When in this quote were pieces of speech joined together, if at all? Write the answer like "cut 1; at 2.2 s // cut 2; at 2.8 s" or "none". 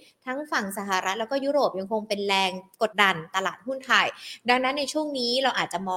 cut 1; at 2.9 s